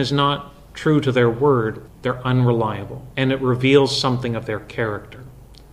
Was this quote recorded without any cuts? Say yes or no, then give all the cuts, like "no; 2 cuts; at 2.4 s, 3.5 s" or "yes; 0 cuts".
no; 2 cuts; at 1.9 s, 3.1 s